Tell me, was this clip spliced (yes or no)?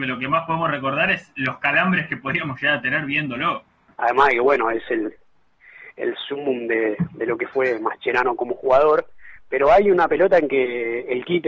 yes